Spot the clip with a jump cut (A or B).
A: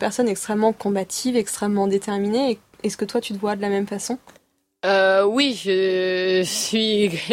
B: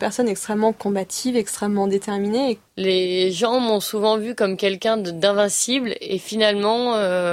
B